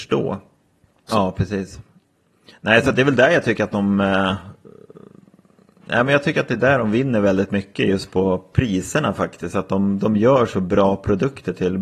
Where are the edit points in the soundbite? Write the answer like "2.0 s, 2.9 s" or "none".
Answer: 1.1 s